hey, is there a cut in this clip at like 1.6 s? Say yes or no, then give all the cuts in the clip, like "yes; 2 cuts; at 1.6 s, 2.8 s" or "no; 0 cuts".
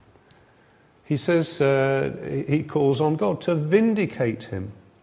no; 0 cuts